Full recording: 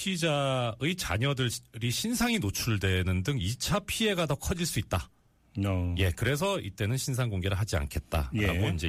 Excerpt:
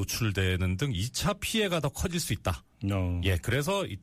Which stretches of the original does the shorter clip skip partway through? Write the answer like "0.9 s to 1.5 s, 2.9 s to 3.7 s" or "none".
5.2 s to 5.5 s

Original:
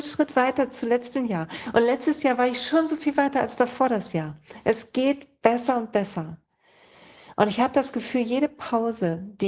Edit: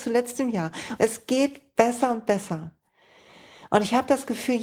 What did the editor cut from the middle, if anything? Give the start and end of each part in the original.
1.7 s to 4.6 s

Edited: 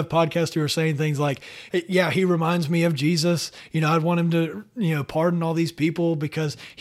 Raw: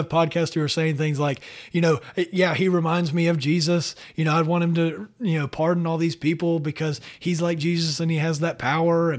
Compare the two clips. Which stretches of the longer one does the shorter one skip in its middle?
1.7 s to 2.1 s

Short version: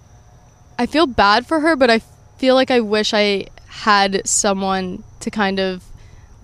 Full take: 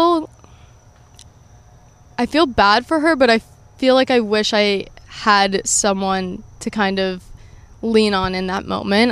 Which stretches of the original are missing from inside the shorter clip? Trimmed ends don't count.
none

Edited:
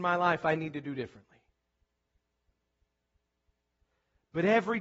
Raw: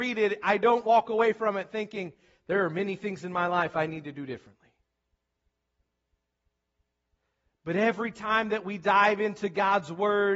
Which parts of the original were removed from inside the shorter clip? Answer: none

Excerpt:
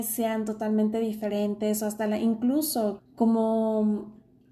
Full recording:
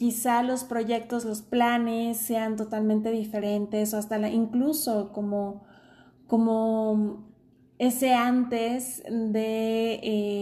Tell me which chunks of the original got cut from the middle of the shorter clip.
5.1 s to 6.1 s

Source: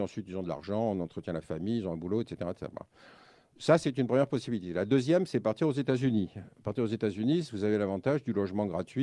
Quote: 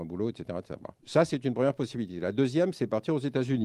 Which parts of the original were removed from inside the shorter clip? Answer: 2.9 s to 3.5 s

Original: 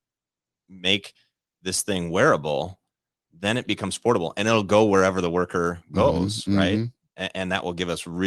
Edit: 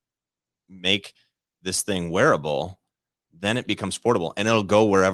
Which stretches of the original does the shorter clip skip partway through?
none

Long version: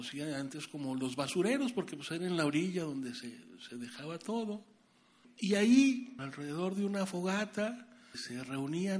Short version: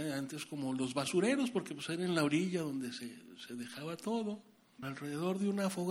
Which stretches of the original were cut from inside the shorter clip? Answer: 5.0 s to 6.1 s

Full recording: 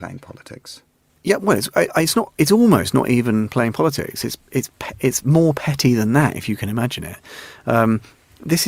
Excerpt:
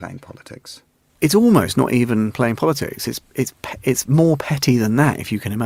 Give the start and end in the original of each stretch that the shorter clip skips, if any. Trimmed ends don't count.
1.2 s to 2.3 s

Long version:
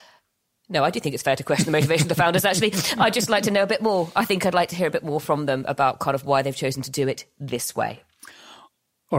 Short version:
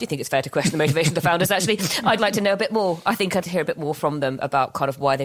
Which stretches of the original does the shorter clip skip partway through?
3.1 s to 3.3 s, 4.5 s to 4.7 s

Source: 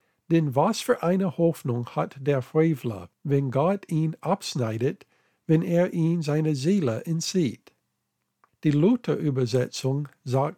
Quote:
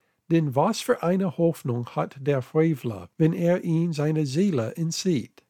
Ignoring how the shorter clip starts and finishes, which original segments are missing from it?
3.1 s to 5.4 s

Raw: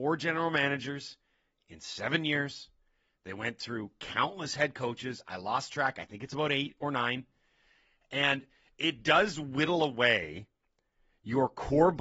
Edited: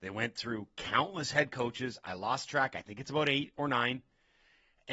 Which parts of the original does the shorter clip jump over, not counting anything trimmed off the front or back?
none

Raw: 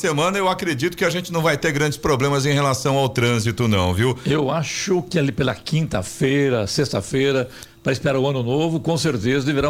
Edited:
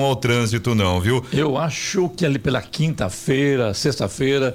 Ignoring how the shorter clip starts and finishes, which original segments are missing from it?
none

